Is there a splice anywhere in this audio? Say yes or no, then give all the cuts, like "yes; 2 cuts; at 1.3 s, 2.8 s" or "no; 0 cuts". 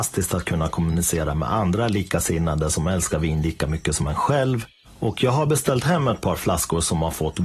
yes; 1 cut; at 4.8 s